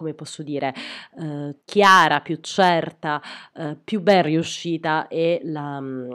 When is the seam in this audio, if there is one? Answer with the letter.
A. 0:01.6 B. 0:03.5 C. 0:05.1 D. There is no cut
A